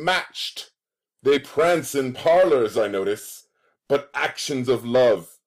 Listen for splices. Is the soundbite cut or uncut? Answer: uncut